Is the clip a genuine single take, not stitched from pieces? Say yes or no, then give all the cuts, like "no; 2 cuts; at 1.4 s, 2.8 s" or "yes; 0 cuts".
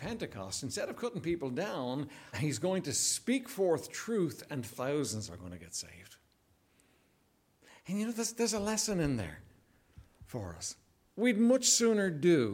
no; 1 cut; at 2.3 s